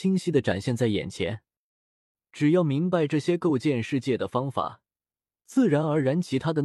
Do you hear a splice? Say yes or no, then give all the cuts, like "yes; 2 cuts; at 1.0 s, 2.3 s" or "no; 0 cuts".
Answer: no; 0 cuts